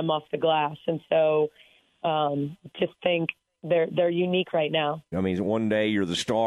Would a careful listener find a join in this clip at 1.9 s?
no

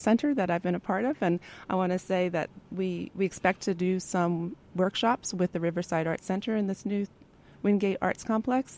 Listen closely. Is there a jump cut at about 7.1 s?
no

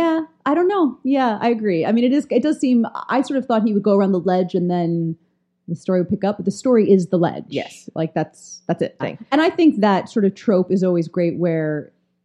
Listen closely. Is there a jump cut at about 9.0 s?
yes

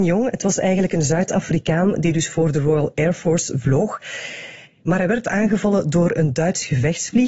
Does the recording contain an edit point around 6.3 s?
no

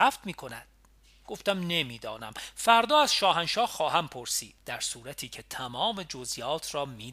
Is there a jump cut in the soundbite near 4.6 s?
yes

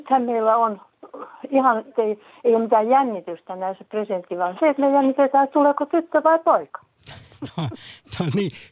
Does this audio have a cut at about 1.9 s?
yes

